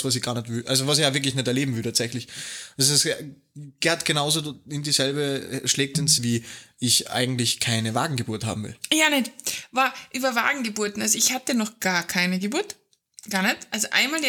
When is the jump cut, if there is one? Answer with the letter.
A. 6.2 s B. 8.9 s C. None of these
A